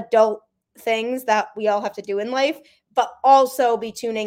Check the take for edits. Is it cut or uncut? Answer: uncut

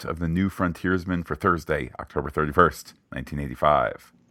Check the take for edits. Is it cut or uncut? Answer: uncut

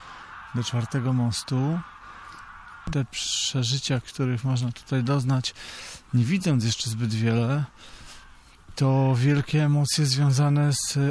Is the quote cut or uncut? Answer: cut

